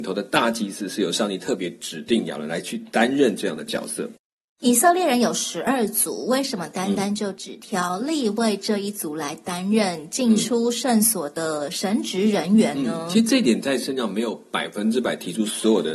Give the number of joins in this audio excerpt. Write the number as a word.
zero